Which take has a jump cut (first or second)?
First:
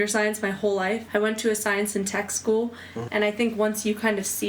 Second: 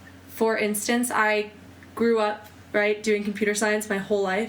first